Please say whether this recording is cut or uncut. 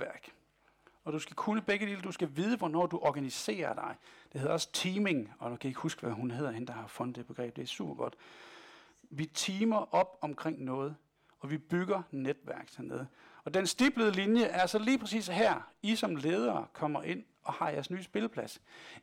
uncut